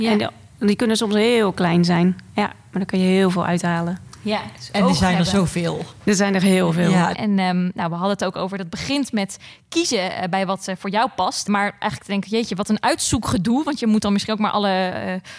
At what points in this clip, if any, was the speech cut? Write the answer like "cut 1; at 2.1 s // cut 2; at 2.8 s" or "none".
cut 1; at 7.1 s // cut 2; at 11.5 s